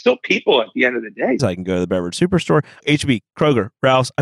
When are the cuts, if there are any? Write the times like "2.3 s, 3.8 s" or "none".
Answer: 1.4 s, 2.8 s